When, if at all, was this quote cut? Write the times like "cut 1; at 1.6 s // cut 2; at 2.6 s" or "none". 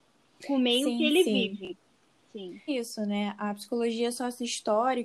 cut 1; at 2.7 s

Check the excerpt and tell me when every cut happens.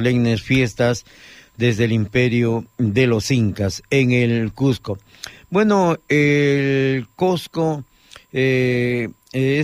none

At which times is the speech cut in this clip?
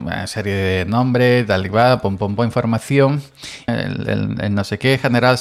cut 1; at 3.7 s

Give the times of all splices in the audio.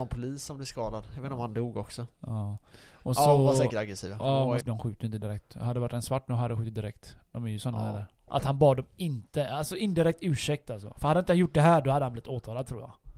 cut 1; at 4.6 s // cut 2; at 8.3 s

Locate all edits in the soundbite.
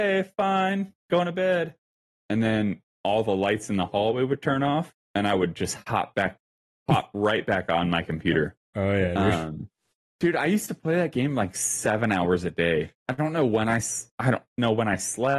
none

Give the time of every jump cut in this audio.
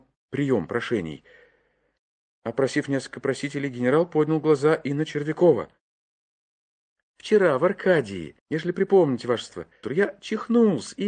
cut 1; at 8.4 s // cut 2; at 9.8 s

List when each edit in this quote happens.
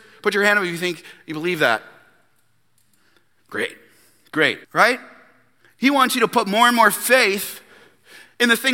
cut 1; at 4.6 s

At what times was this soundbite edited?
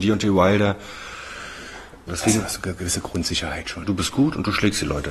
cut 1; at 2.1 s // cut 2; at 3.8 s

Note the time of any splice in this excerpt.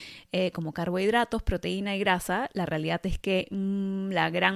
none

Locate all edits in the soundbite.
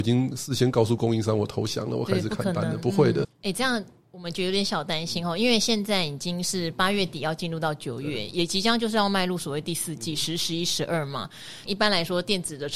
cut 1; at 3.2 s // cut 2; at 11.7 s

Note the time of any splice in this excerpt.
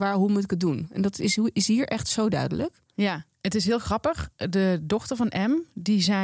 cut 1; at 3.3 s

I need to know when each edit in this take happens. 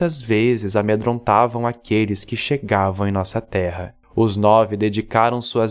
cut 1; at 4.0 s

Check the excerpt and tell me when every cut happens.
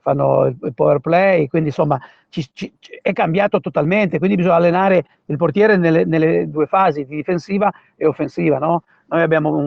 none

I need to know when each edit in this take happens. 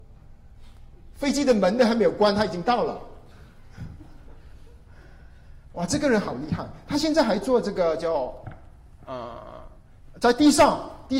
none

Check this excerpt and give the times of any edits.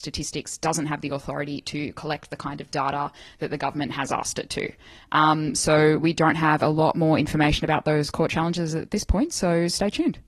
none

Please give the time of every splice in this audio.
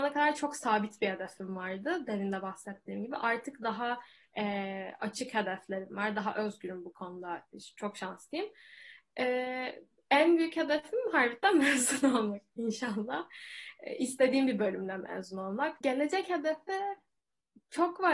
cut 1; at 15.8 s

